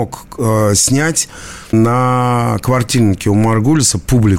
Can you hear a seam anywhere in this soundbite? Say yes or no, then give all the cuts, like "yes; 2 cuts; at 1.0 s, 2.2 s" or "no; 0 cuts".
no; 0 cuts